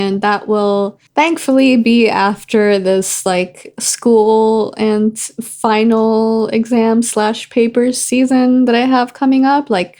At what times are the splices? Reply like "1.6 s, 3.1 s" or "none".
1.1 s